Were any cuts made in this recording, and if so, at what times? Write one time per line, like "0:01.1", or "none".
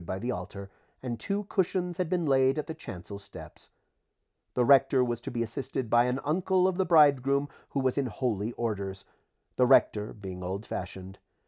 none